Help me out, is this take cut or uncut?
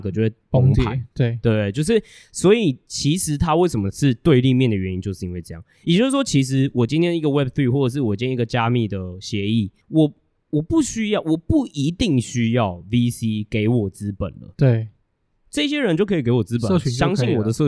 cut